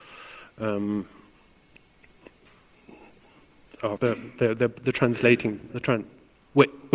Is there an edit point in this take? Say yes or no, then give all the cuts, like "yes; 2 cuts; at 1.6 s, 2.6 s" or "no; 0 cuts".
yes; 1 cut; at 4.0 s